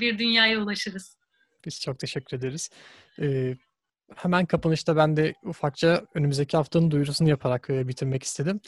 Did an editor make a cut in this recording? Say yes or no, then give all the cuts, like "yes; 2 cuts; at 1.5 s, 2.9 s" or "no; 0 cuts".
no; 0 cuts